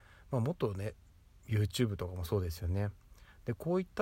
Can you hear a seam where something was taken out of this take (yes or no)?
no